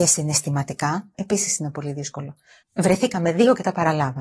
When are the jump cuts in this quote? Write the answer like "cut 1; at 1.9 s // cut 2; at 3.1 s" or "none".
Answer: cut 1; at 1.1 s // cut 2; at 2.6 s